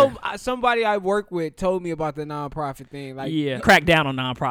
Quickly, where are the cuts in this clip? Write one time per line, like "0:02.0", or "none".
0:03.6